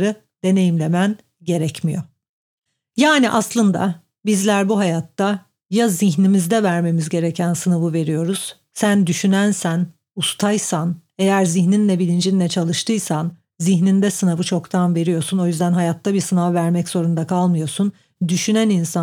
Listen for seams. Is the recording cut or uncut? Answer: uncut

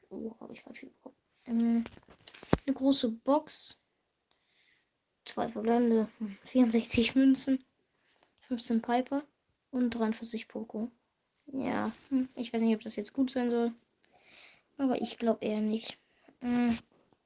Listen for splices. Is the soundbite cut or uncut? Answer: uncut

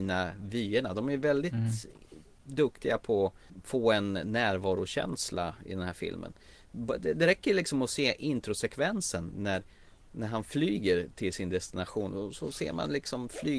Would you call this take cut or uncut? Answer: uncut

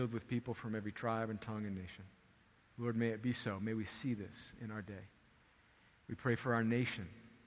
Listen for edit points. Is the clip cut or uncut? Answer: uncut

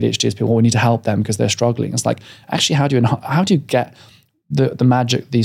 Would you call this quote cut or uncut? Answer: uncut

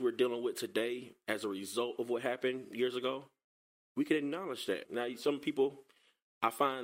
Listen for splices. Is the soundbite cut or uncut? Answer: cut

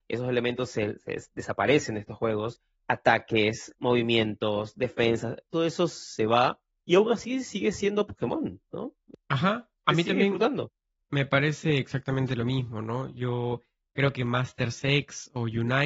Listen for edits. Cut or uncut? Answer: uncut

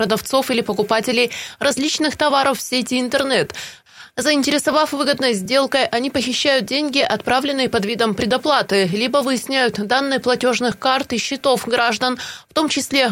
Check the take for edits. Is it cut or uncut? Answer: uncut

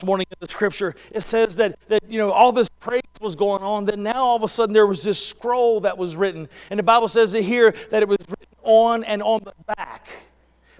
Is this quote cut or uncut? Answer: uncut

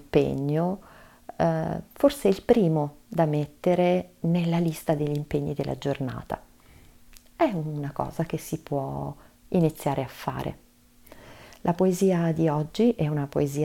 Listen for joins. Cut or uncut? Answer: uncut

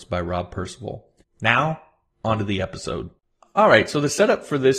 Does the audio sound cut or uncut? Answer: cut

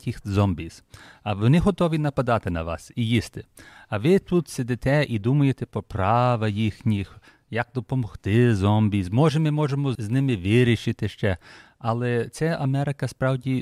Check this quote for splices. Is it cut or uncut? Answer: cut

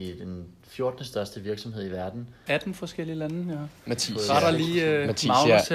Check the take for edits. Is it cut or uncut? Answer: cut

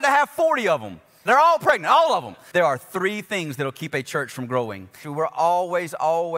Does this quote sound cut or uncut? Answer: cut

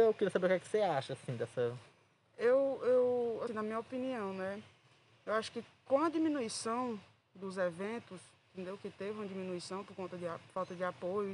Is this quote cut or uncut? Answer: cut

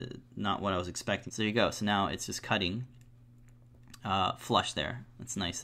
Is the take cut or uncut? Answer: cut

